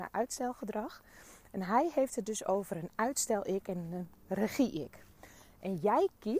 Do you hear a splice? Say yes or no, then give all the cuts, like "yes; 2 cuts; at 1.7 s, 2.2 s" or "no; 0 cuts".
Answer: no; 0 cuts